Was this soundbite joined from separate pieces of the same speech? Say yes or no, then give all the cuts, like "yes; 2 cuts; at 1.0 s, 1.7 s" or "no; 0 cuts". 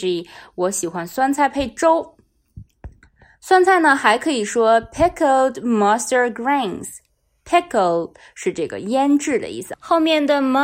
no; 0 cuts